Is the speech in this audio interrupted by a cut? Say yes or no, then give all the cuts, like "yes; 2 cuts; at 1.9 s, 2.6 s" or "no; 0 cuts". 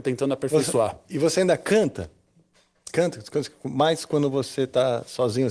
no; 0 cuts